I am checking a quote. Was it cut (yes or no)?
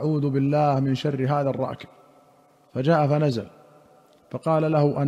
no